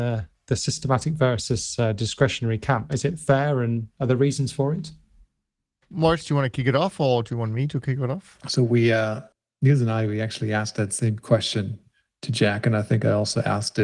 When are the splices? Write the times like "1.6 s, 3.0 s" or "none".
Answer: 2.9 s

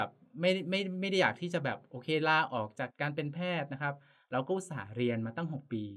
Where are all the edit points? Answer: 2.9 s

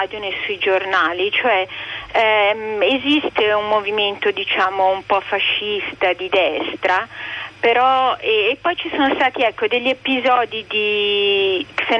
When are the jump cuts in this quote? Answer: none

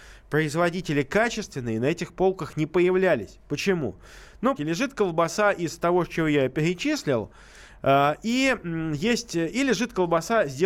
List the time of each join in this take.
4.6 s

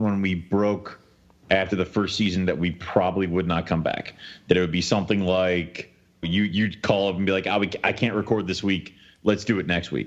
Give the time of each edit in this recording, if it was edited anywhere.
6.2 s

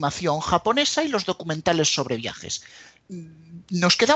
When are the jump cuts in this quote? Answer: 3.1 s

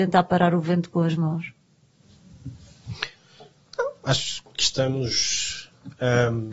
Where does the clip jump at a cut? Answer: 4.5 s

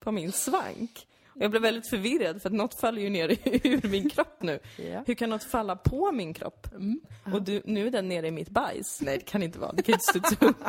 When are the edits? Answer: 4.4 s, 7.0 s, 9.0 s

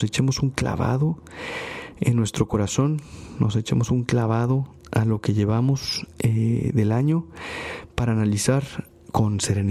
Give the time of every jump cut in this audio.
none

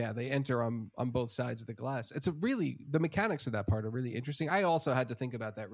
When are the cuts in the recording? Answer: none

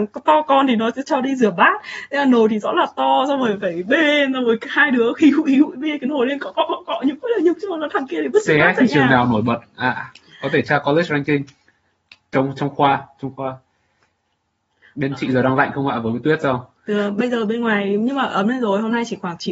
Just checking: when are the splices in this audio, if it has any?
none

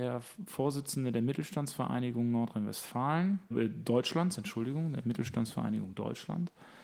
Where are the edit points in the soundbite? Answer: 3.5 s

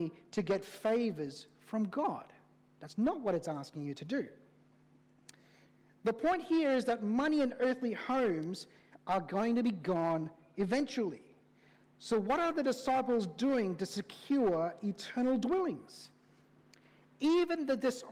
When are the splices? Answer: none

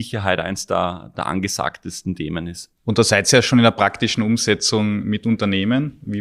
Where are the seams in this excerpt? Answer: 1.1 s, 2.8 s

